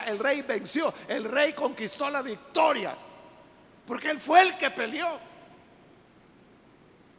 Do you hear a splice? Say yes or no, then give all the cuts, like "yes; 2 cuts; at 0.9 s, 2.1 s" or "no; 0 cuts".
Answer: no; 0 cuts